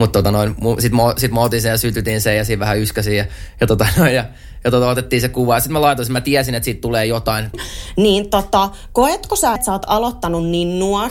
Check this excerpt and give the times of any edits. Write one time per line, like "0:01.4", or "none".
0:07.5
0:09.6